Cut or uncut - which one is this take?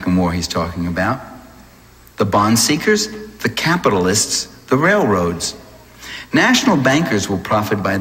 uncut